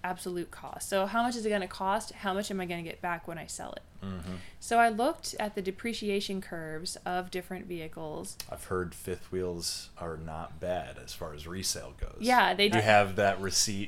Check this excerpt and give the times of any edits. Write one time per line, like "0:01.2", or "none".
0:12.7